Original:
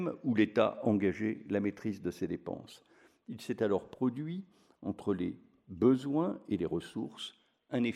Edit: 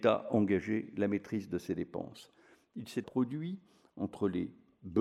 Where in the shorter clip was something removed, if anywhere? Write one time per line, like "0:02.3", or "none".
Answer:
0:03.0